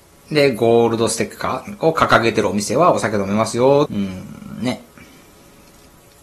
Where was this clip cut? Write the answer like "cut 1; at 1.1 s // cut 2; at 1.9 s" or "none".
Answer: cut 1; at 3.9 s